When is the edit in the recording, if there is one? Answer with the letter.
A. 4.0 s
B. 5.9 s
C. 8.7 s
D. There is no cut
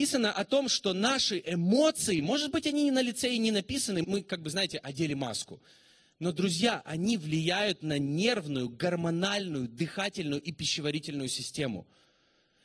A